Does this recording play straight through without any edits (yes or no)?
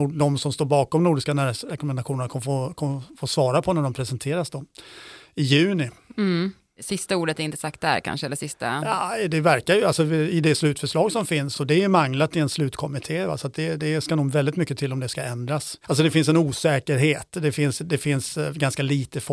yes